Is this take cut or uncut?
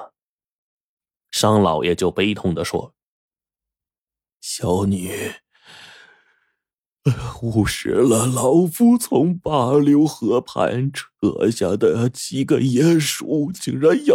uncut